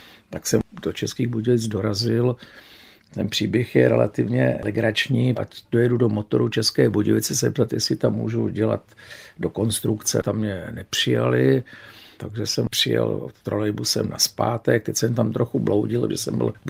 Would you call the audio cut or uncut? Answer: cut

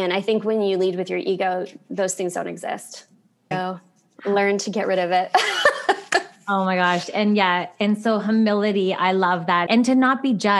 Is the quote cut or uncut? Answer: cut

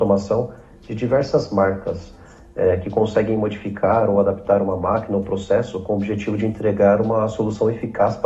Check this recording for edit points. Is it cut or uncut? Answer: uncut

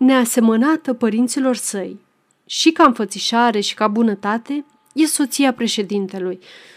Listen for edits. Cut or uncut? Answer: uncut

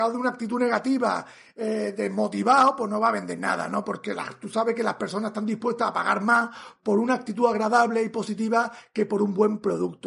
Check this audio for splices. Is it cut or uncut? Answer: uncut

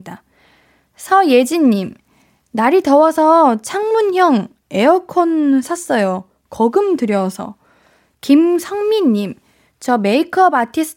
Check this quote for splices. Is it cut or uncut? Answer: cut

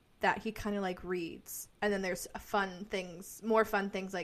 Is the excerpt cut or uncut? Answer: cut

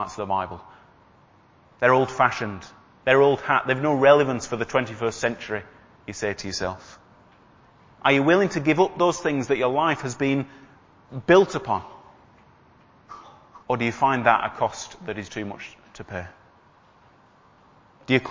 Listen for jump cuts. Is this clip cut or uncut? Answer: cut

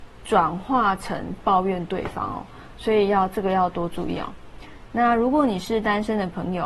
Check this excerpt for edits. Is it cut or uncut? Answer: uncut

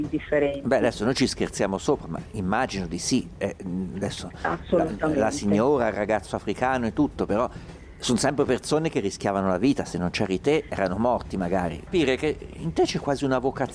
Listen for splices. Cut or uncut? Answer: cut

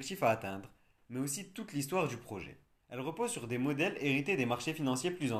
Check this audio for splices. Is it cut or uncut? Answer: cut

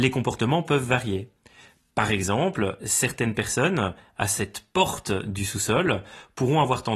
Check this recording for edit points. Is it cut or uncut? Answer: uncut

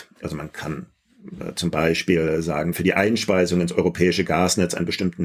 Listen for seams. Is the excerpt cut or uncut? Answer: cut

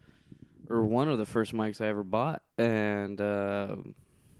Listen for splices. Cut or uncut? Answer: cut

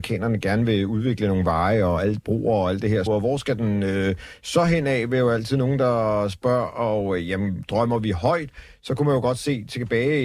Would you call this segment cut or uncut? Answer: cut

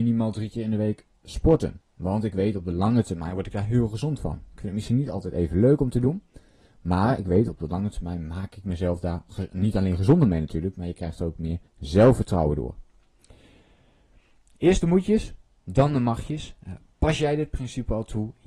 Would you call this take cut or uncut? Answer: cut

